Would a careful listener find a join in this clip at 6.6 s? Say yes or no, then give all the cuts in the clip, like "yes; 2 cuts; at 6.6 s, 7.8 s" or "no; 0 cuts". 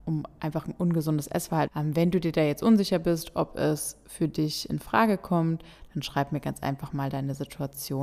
no; 1 cut; at 1.7 s